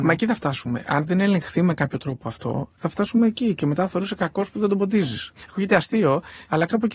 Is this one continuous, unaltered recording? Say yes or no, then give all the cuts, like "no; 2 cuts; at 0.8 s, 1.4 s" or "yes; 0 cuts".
yes; 0 cuts